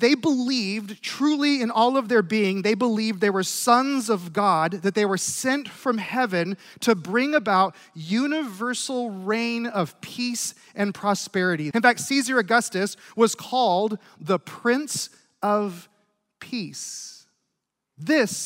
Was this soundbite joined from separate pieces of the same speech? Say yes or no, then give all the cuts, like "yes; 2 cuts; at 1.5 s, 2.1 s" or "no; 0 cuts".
yes; 1 cut; at 11.7 s